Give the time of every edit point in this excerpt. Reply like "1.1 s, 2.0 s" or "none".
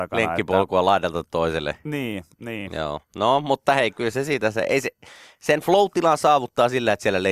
none